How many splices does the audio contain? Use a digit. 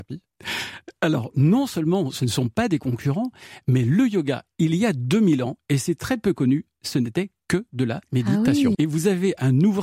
1